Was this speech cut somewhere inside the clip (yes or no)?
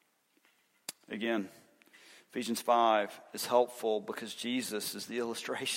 no